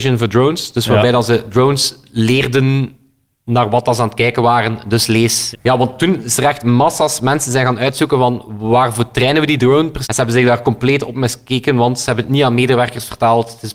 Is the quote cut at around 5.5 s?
yes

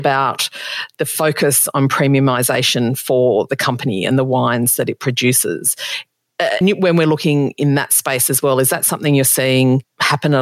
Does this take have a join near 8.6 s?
no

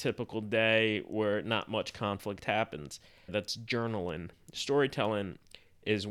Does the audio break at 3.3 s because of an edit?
yes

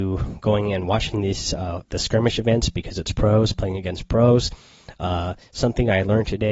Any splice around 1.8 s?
yes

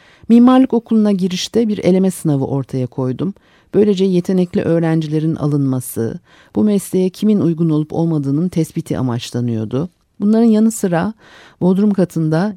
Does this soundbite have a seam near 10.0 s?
yes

